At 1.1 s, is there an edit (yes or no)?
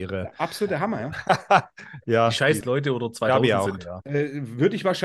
no